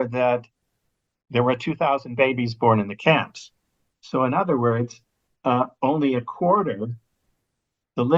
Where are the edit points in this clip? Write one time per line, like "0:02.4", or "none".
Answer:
none